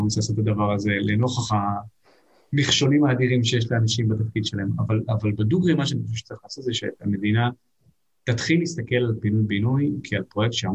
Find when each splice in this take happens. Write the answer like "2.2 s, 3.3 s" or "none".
none